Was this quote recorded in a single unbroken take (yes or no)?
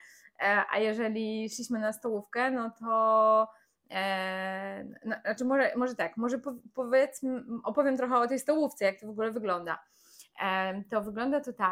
yes